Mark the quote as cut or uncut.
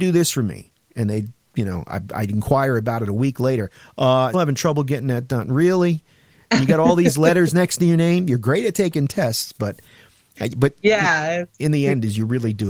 cut